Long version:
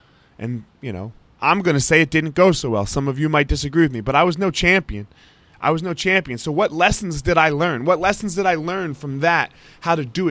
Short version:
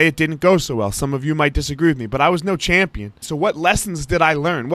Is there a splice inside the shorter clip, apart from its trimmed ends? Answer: yes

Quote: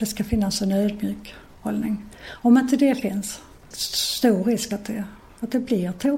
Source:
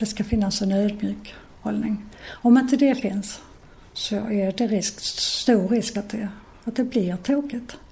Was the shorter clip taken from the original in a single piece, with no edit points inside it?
no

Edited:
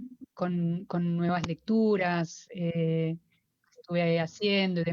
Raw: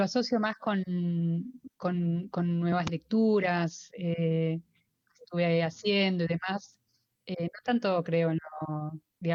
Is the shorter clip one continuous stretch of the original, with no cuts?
yes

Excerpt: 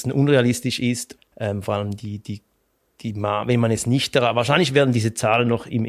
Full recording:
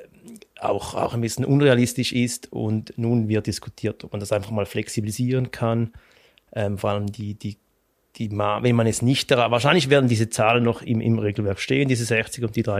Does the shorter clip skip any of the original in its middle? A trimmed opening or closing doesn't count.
yes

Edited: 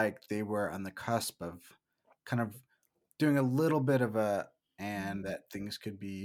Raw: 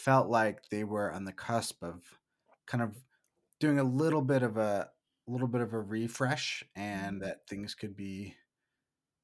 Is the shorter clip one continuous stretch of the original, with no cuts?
no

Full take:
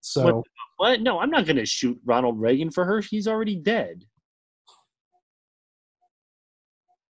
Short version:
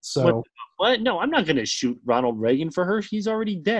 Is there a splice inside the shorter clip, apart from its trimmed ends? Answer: no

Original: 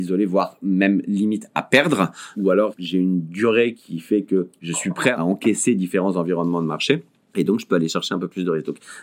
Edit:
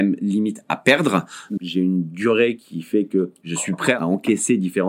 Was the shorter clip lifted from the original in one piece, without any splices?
no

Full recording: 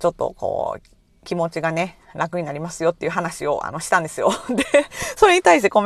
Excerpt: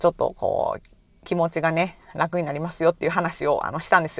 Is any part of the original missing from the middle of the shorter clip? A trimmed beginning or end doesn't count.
no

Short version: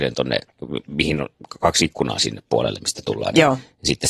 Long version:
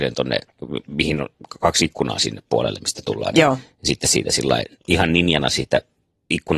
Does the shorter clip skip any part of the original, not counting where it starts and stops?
no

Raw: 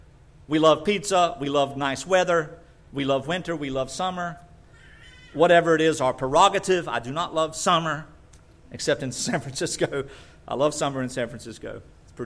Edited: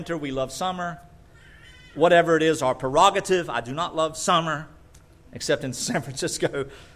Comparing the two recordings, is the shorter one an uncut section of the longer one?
yes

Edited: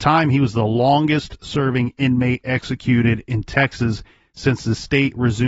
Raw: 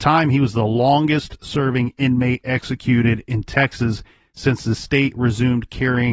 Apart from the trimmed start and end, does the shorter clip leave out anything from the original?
no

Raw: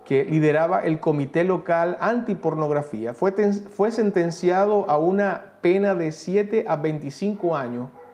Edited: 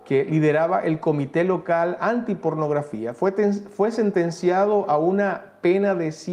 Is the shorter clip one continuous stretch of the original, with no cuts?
yes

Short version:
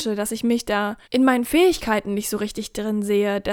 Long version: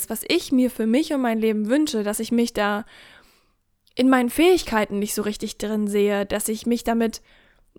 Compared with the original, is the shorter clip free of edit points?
no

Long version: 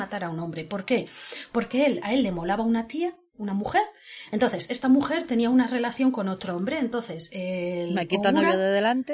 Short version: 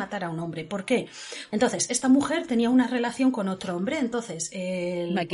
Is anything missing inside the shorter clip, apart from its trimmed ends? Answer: yes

